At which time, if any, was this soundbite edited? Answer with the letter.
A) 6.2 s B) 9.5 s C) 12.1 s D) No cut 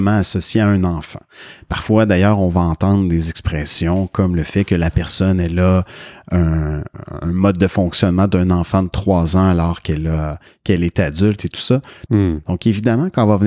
C